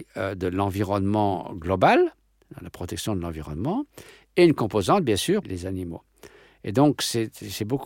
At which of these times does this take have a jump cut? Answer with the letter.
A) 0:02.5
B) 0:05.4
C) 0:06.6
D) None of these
B